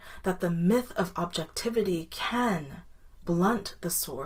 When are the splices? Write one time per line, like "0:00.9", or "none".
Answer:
0:03.2